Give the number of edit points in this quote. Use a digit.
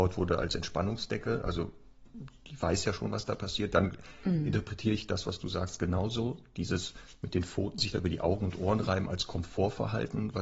0